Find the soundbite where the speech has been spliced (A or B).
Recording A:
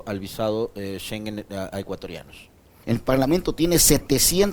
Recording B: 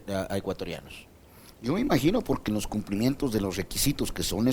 A